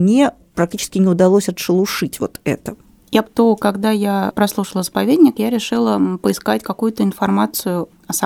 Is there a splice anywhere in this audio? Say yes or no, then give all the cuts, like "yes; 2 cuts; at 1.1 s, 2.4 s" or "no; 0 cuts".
yes; 1 cut; at 3.2 s